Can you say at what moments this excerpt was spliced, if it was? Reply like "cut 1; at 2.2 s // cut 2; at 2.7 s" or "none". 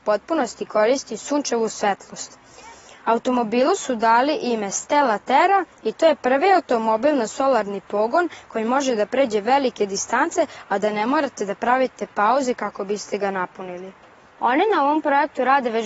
none